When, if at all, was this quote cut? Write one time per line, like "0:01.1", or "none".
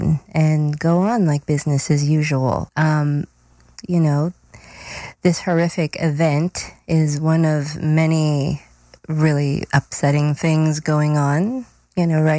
0:02.7
0:03.8